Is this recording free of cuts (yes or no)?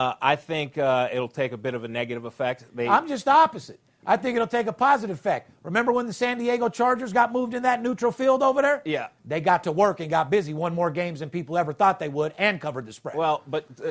yes